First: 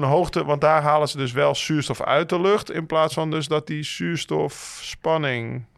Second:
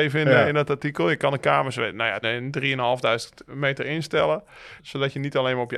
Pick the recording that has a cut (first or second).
second